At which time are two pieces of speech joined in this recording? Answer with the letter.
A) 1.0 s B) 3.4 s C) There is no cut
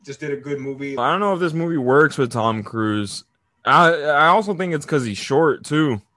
A